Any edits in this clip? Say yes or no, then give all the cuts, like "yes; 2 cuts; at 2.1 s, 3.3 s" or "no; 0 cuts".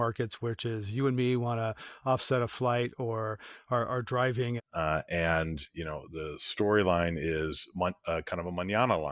yes; 1 cut; at 4.6 s